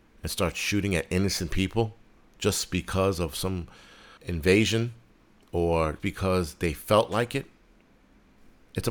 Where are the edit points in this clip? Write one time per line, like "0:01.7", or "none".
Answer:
0:04.2
0:06.0